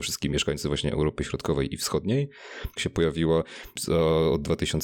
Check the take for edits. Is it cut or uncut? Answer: cut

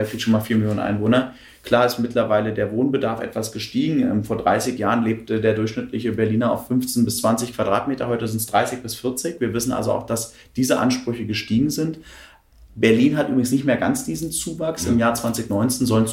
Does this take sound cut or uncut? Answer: uncut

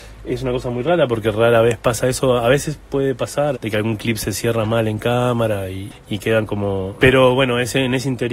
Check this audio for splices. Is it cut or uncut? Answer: cut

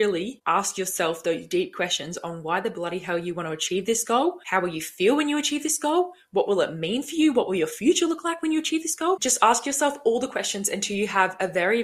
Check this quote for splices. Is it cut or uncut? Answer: uncut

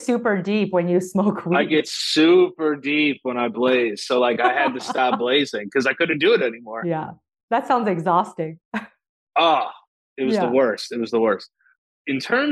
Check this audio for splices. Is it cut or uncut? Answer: uncut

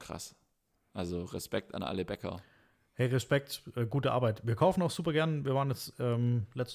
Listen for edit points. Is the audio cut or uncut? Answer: uncut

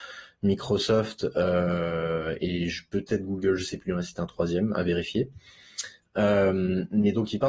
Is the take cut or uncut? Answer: uncut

